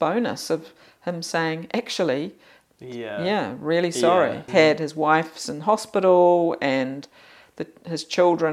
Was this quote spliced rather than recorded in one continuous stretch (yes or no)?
yes